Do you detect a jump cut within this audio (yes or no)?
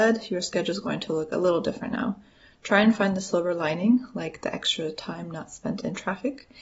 no